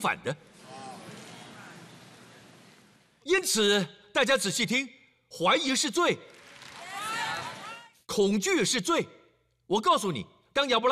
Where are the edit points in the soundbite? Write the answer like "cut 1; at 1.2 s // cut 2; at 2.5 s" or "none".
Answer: cut 1; at 3.2 s